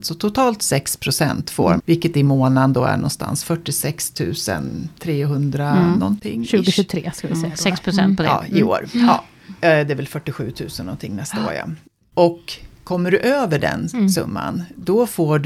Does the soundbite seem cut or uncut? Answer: cut